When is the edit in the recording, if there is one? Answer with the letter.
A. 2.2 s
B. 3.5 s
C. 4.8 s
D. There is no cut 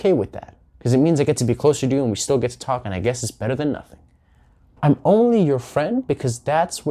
C